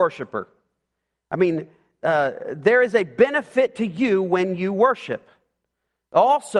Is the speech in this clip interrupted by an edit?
no; 0 cuts

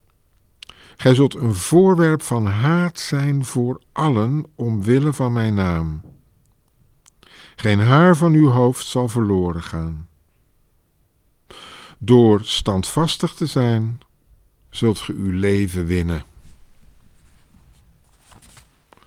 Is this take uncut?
no; 1 cut; at 0.9 s

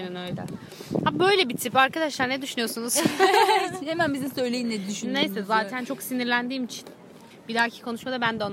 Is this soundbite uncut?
yes; 0 cuts

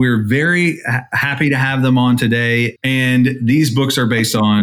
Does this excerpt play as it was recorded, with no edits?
no; 1 cut; at 2.8 s

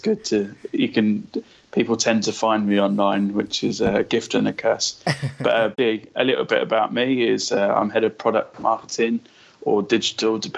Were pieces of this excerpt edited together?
yes; 1 cut; at 5.7 s

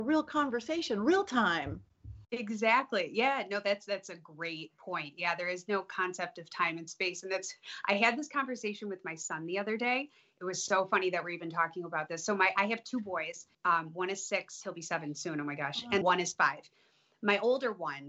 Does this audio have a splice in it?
yes; 2 cuts; at 13.5 s, 16.0 s

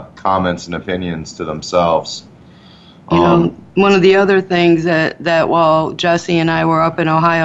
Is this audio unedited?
yes; 0 cuts

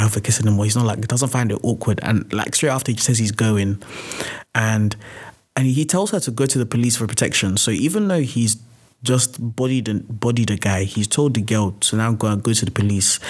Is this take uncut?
yes; 0 cuts

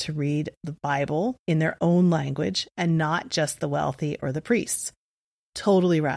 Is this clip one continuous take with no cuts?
no; 1 cut; at 1.4 s

